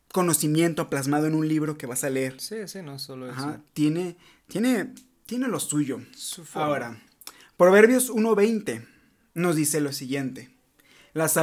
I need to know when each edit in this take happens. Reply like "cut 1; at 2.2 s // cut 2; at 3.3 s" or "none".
none